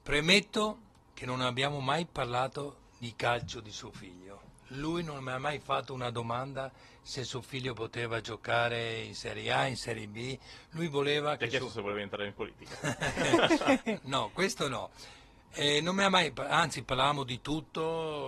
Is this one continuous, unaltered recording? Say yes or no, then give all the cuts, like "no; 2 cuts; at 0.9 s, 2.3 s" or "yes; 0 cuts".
no; 1 cut; at 14.0 s